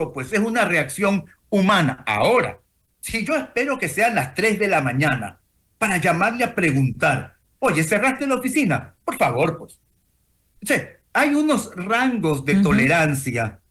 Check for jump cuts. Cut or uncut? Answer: uncut